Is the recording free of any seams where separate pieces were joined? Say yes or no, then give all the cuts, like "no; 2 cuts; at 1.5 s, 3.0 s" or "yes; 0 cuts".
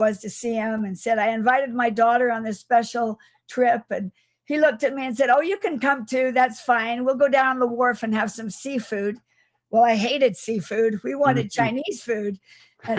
yes; 0 cuts